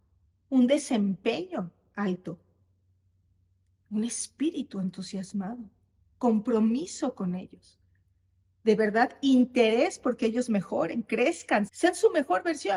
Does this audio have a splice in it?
yes; 1 cut; at 11.7 s

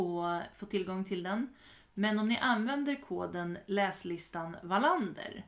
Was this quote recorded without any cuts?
yes; 0 cuts

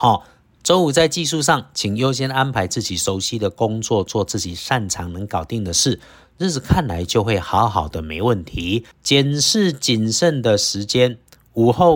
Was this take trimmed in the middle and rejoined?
yes; 1 cut; at 8.9 s

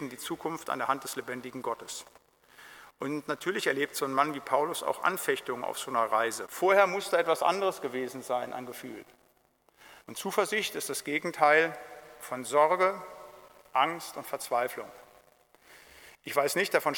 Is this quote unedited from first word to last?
no; 2 cuts; at 6.5 s, 10.0 s

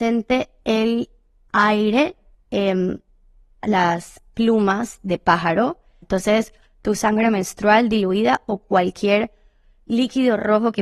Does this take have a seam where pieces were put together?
yes; 2 cuts; at 2.3 s, 6.0 s

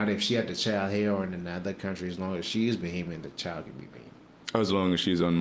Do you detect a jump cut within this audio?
no; 0 cuts

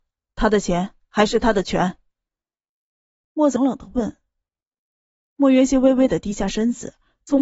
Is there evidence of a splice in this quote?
yes; 1 cut; at 3.6 s

